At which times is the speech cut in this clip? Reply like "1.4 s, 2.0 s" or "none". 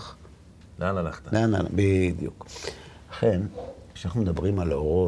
none